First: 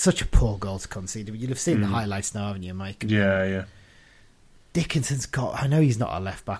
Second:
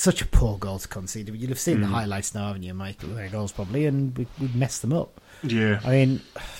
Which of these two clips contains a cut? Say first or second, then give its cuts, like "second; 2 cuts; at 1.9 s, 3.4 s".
second; 1 cut; at 3.0 s